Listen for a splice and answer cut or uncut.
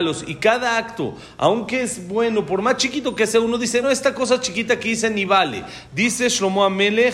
cut